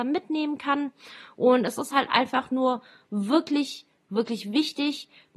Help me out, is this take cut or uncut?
uncut